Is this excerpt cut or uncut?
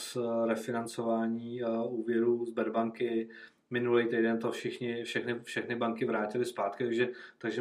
uncut